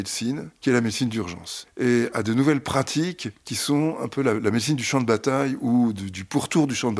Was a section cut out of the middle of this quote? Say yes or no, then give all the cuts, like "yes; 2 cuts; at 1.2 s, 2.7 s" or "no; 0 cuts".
no; 0 cuts